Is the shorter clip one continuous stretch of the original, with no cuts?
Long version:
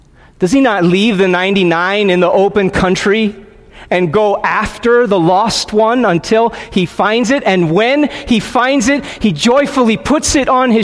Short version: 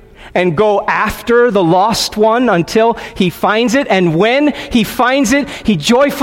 yes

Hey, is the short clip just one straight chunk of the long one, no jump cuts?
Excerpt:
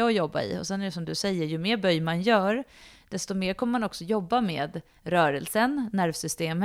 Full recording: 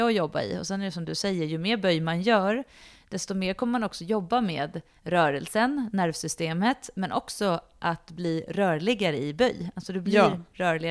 yes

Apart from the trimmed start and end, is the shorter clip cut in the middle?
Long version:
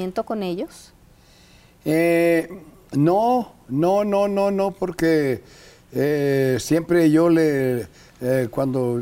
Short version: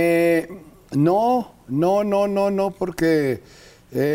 no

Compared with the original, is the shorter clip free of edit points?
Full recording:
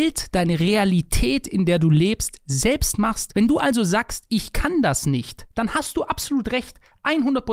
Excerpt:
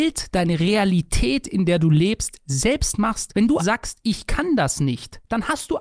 no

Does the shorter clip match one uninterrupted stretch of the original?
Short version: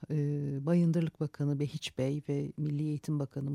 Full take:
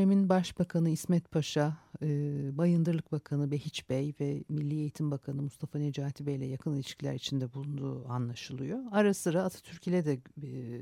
yes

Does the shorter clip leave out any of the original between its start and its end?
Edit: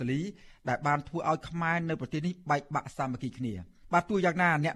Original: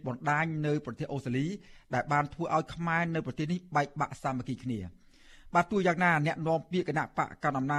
yes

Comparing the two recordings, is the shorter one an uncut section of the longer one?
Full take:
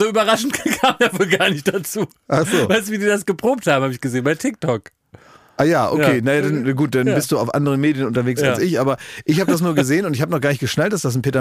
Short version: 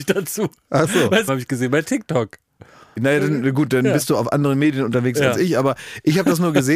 no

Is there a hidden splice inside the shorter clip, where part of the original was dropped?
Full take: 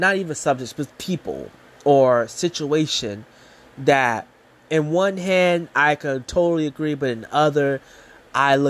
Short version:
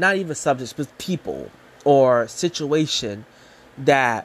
no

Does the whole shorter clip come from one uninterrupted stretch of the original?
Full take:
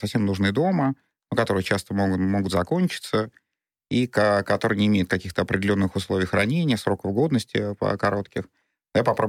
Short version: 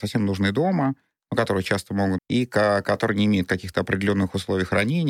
no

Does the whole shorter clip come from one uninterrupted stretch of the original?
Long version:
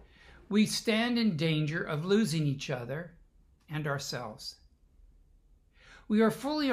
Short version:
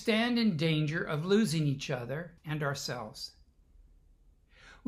no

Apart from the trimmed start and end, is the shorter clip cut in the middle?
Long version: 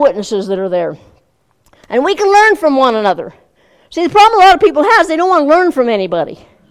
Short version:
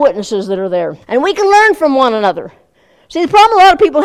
yes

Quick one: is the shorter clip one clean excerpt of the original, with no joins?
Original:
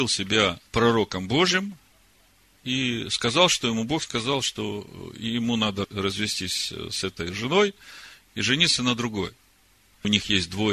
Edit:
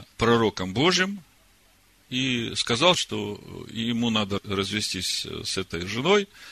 no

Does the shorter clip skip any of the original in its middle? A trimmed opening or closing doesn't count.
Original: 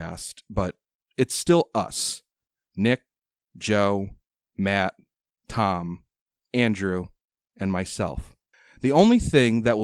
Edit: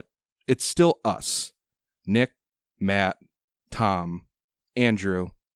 yes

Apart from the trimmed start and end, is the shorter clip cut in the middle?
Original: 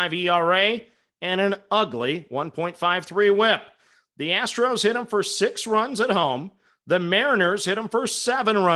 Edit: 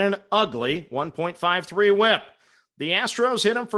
no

